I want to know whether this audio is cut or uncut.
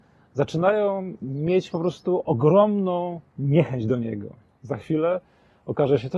cut